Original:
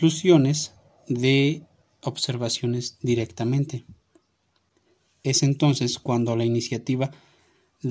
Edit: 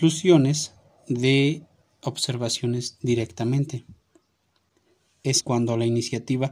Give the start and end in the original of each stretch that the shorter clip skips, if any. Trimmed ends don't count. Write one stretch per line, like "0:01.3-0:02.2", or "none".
0:05.4-0:06.0